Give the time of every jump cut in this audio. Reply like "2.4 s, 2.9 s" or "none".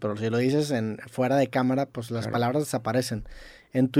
none